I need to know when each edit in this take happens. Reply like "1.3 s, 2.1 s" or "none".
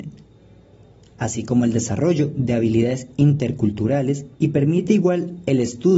4.3 s